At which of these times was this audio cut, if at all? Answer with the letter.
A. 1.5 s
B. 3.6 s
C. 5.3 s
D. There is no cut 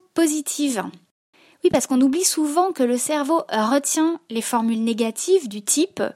D